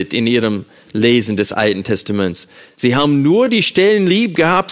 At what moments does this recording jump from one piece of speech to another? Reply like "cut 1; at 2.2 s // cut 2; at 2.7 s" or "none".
none